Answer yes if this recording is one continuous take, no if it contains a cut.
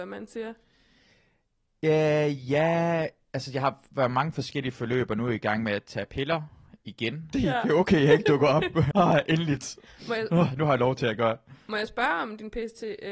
no